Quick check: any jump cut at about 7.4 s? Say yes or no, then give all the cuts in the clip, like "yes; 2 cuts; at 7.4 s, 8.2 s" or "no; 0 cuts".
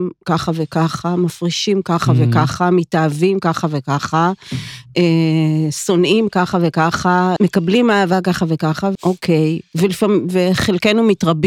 yes; 2 cuts; at 7.4 s, 9.0 s